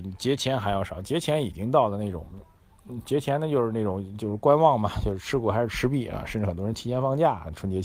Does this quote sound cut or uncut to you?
uncut